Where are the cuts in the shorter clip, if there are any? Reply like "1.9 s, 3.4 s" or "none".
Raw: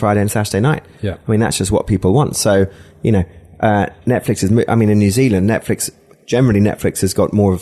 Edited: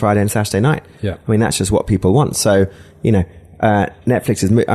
none